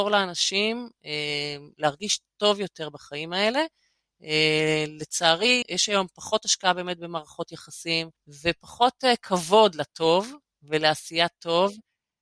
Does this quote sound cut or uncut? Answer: cut